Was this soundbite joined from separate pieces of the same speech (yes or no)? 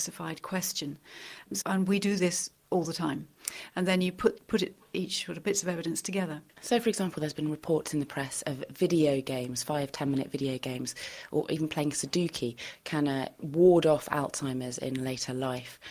yes